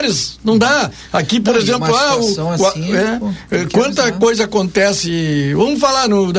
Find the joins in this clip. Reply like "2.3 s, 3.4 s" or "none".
none

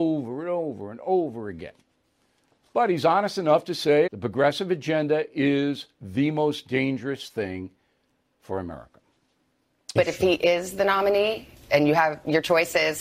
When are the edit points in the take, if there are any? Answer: 4.1 s, 10.0 s

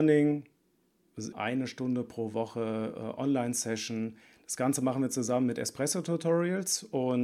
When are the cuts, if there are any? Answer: 1.3 s

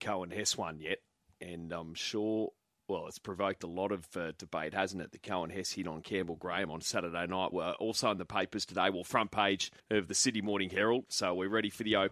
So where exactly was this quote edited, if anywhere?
7.5 s, 9.8 s, 11.1 s

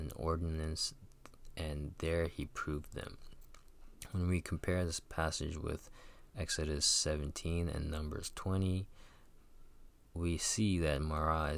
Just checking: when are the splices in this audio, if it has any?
none

